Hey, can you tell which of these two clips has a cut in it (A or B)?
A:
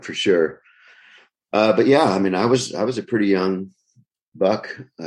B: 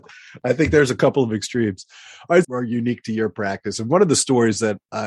B